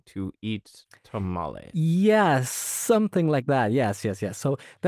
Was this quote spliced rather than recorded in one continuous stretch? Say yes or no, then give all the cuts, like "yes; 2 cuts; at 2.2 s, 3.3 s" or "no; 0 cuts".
no; 0 cuts